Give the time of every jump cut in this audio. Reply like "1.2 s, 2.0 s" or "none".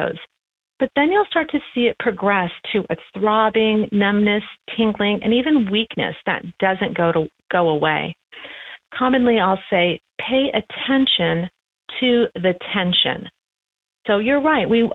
none